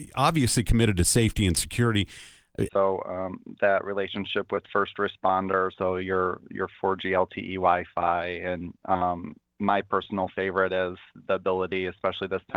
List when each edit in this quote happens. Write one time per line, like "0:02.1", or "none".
0:02.7
0:05.7